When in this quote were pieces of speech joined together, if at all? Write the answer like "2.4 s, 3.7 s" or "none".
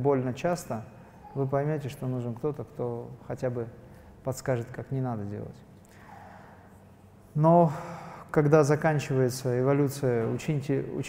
none